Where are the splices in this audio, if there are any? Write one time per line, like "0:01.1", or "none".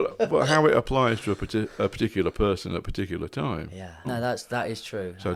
0:04.0

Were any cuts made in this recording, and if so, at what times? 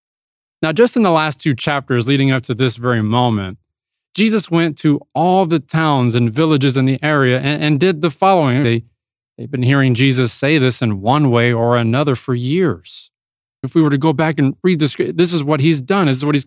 0:08.6
0:13.6

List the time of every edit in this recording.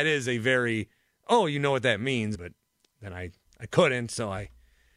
0:02.3

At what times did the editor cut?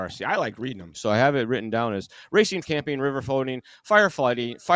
0:00.9
0:02.6

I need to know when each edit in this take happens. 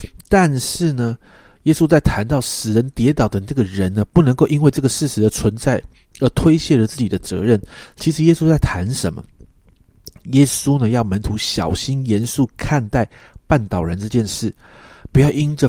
none

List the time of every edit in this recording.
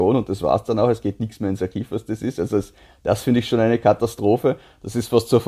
none

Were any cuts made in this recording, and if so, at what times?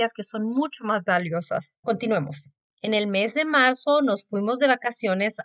0:01.8

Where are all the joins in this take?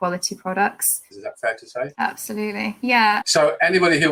0:01.1
0:03.2

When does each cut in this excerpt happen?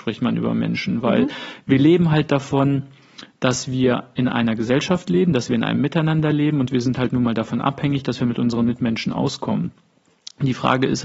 none

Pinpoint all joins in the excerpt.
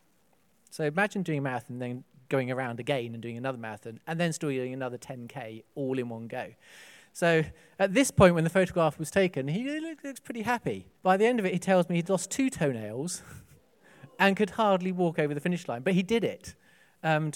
0:11.0

